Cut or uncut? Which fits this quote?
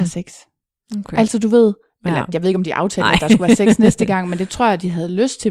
uncut